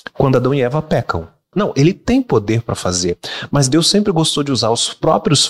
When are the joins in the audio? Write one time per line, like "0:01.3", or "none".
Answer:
0:01.5